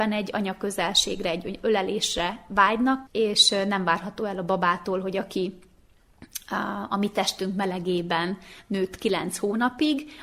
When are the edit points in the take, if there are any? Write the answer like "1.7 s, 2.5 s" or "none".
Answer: 3.1 s